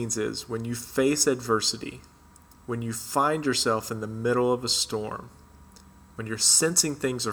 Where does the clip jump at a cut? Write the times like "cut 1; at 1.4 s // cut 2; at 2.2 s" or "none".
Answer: none